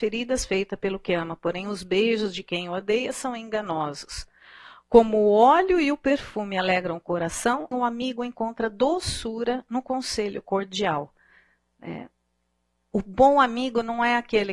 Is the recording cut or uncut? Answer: cut